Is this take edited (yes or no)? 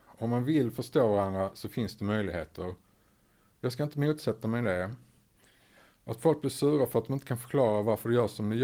no